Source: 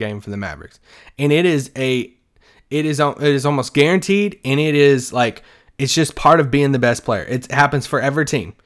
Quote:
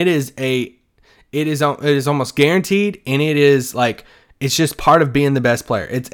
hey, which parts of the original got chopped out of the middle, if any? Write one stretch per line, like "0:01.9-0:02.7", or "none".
none